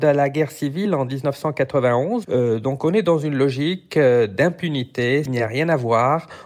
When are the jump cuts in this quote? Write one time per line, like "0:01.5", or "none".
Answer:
0:02.2
0:05.3

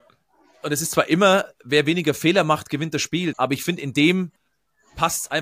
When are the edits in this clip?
0:03.3

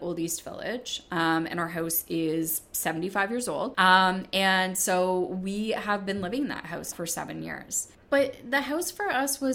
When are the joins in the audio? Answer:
0:03.7
0:06.9

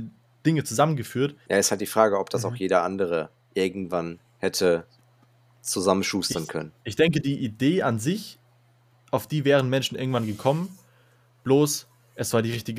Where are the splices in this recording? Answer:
0:01.5

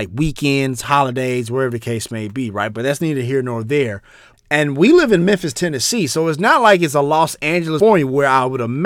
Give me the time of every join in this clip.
0:02.7
0:04.3

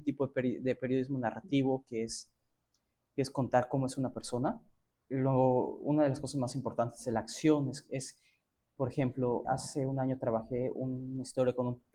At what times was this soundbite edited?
0:09.4

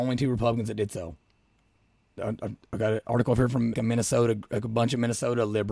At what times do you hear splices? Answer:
0:02.2
0:03.7

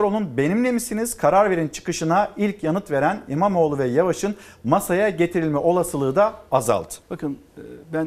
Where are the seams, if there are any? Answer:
0:07.0

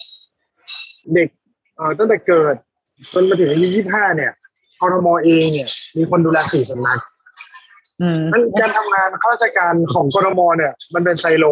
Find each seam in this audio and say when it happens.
0:01.0

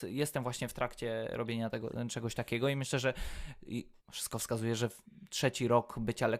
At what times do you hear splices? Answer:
0:04.0

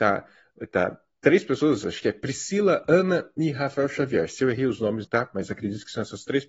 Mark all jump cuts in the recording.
0:05.0

